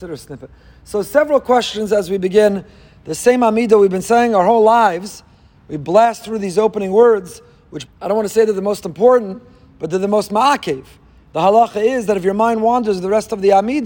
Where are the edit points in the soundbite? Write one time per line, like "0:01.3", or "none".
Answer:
0:07.9